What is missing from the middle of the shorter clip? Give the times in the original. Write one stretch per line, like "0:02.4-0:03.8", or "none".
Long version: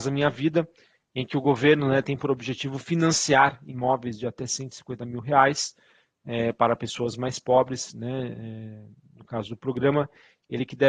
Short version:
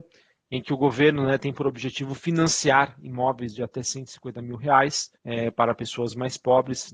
0:05.8-0:06.2

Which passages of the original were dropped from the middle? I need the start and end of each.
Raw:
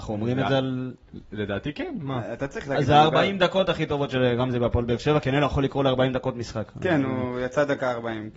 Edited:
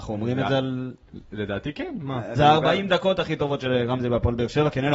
0:02.4-0:02.9

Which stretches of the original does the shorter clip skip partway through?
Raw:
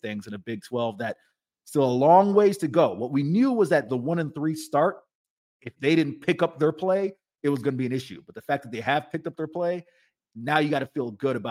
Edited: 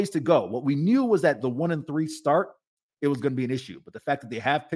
0:05.4-0:07.3

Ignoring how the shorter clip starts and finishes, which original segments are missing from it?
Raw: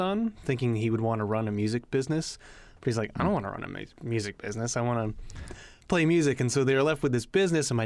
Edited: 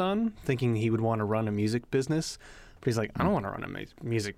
none

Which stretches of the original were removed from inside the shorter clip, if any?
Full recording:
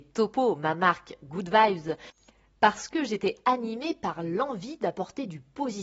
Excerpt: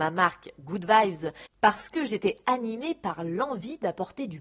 0:02.2-0:02.5

